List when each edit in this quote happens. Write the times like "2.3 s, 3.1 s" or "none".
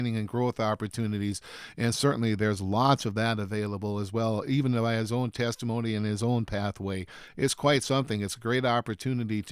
none